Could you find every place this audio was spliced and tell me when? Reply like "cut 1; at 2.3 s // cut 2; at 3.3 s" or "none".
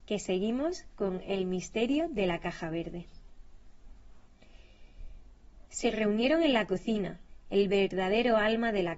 cut 1; at 5.7 s